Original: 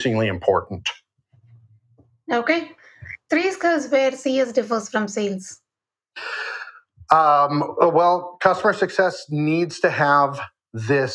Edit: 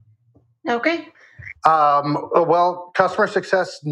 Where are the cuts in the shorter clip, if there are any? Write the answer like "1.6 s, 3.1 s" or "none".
1.6 s